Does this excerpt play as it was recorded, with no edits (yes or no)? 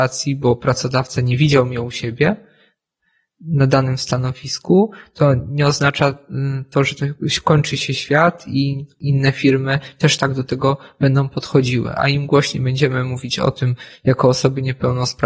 yes